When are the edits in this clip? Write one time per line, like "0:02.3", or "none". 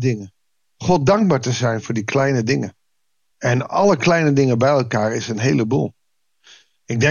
0:03.3